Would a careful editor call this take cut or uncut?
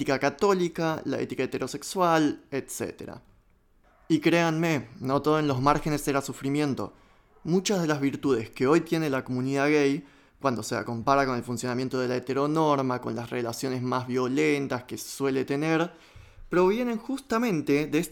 uncut